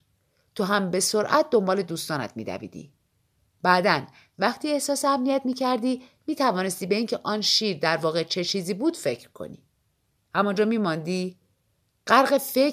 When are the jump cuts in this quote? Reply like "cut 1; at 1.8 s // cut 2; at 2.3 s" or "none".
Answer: cut 1; at 10.2 s